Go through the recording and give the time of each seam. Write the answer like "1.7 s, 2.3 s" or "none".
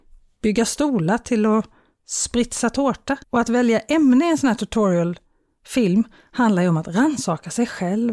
3.2 s